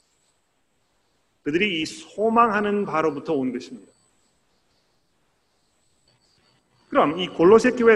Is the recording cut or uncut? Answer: uncut